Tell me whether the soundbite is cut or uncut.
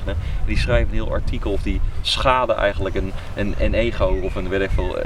uncut